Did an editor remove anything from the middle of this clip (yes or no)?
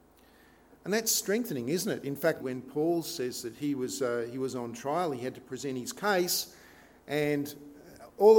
yes